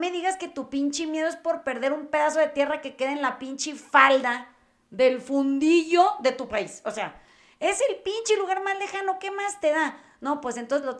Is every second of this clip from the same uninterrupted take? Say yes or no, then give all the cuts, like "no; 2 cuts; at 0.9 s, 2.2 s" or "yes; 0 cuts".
yes; 0 cuts